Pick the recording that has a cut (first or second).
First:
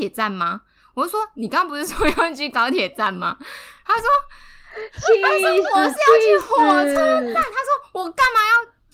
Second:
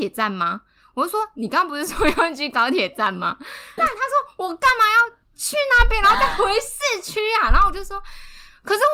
second